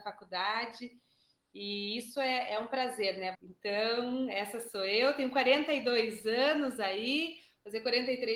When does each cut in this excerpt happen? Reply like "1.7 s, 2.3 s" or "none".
3.3 s